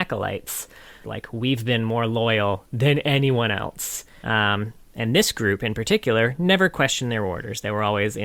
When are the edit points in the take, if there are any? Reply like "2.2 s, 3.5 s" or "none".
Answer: 1.0 s, 4.2 s